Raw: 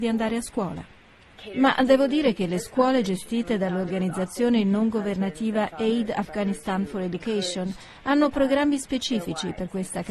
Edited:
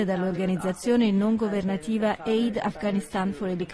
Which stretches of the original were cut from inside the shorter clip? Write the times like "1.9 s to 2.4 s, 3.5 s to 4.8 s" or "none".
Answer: none

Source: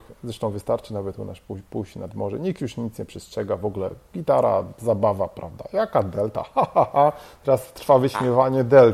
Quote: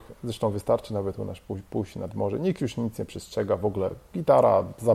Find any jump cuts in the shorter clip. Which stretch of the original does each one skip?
none

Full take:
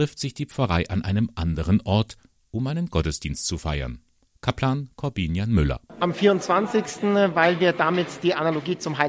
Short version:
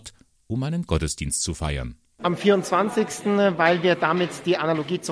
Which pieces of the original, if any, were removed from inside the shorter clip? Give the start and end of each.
4.2 s to 6.0 s

